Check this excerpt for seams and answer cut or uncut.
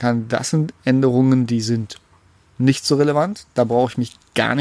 uncut